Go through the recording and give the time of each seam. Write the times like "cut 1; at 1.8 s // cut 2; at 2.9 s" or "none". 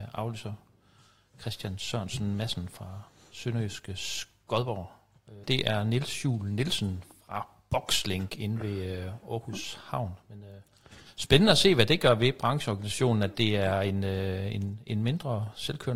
cut 1; at 5.4 s